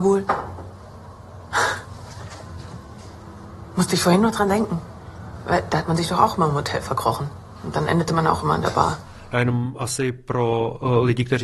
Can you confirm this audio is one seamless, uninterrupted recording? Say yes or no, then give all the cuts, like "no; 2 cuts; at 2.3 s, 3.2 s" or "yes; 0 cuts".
yes; 0 cuts